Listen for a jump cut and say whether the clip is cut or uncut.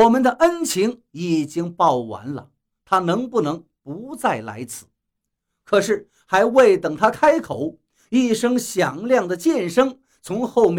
uncut